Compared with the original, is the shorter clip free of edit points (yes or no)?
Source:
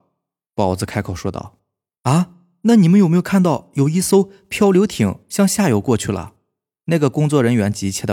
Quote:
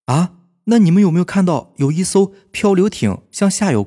yes